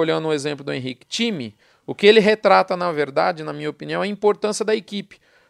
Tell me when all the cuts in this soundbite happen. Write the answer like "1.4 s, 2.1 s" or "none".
1.7 s